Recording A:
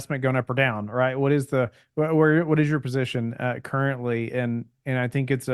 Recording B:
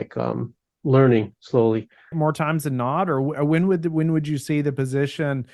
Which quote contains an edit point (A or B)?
B